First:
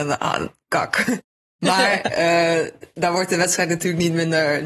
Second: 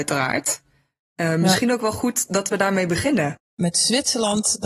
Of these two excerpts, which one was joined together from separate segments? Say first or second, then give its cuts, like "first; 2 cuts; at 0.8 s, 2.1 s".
second; 1 cut; at 3.4 s